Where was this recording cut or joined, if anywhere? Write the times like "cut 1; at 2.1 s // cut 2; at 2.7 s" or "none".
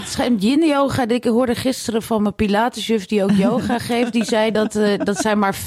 none